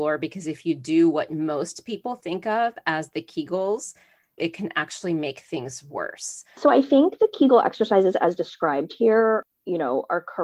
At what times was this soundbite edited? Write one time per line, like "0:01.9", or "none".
0:04.4
0:06.6